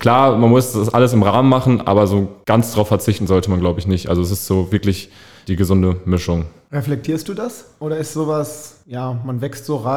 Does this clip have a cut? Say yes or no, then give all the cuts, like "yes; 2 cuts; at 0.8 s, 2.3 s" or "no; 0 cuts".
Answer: no; 0 cuts